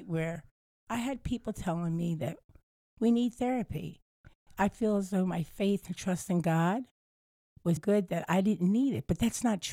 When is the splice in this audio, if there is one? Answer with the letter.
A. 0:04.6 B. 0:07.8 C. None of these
B